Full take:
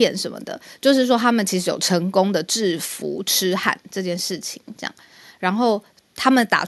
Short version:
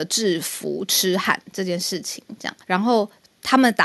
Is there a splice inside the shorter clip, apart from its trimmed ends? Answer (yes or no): yes